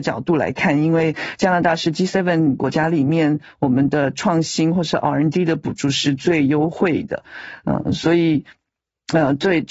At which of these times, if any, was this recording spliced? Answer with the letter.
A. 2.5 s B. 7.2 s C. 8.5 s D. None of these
D